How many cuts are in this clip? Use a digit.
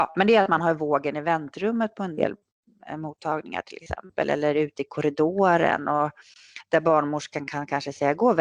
0